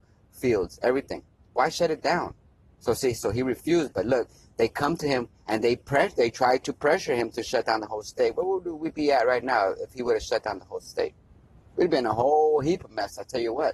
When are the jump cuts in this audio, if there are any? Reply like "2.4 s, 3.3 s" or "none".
none